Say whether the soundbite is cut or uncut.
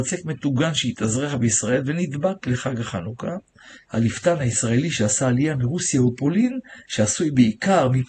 cut